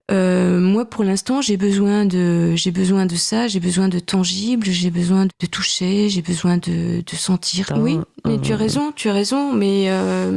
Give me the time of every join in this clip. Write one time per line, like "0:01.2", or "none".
0:05.3
0:07.7